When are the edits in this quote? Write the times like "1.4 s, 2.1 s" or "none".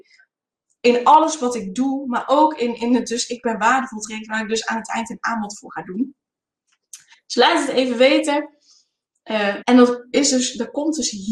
7.1 s, 9.6 s

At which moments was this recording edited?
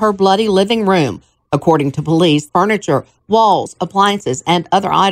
2.5 s

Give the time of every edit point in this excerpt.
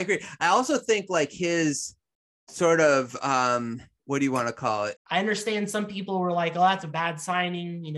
4.9 s

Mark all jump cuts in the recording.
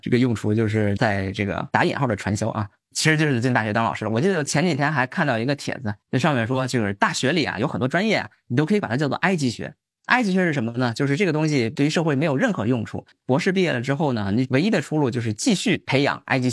none

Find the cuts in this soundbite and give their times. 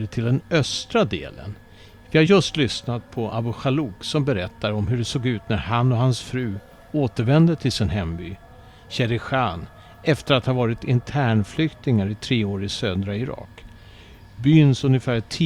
none

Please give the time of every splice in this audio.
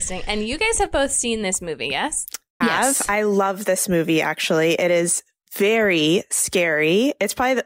2.6 s

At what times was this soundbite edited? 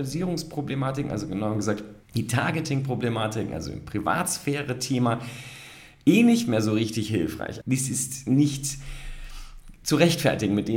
2.0 s, 7.6 s

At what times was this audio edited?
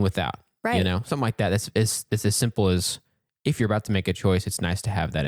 none

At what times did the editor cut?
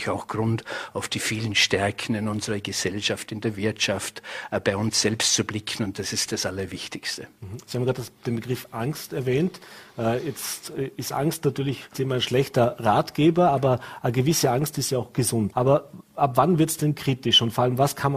6.3 s, 11.9 s, 15.5 s

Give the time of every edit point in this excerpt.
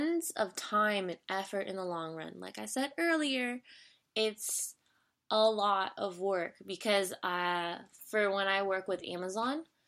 none

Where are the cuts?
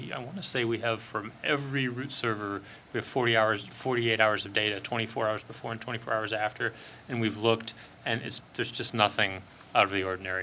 8.4 s

